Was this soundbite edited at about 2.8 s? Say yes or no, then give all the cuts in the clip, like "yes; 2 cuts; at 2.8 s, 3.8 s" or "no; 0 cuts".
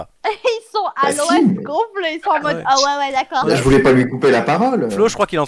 no; 0 cuts